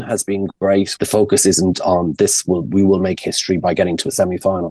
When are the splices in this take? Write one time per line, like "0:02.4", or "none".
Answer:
0:01.0